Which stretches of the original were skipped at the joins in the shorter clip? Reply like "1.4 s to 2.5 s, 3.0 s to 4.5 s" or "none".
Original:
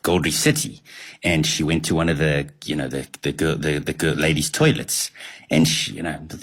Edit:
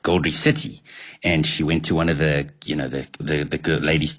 3.2 s to 3.6 s